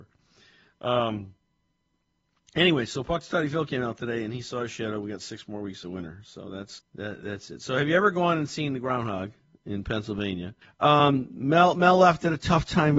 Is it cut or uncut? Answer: cut